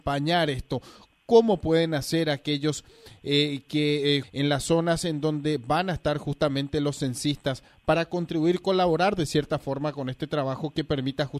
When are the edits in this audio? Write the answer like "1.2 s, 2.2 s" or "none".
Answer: 4.2 s